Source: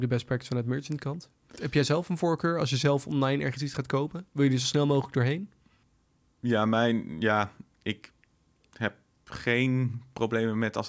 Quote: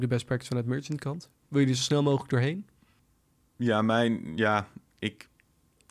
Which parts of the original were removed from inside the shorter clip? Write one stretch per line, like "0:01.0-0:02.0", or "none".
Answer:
0:01.5-0:04.3